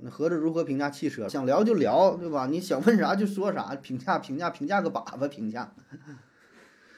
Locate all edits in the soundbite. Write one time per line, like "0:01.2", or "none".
0:01.3